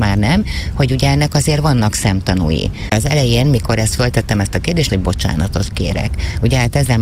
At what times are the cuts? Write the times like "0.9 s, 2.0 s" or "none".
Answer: 2.9 s, 4.9 s

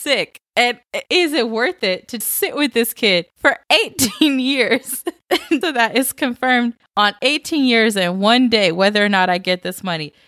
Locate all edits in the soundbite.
1.1 s, 2.2 s, 5.6 s

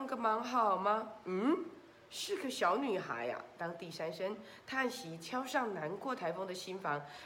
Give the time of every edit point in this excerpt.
none

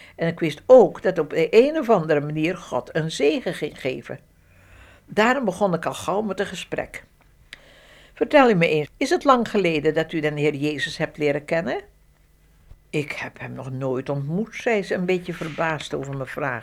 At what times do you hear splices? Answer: 8.8 s

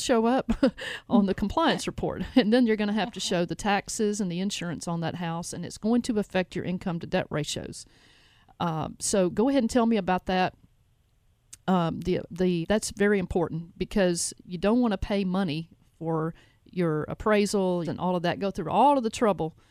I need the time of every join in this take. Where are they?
12.6 s, 17.8 s

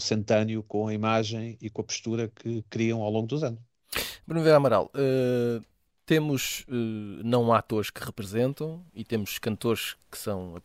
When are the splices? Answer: none

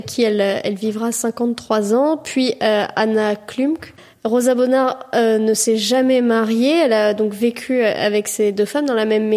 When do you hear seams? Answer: none

